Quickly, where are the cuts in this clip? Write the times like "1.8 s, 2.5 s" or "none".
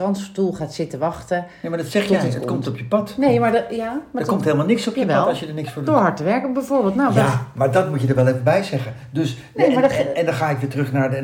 none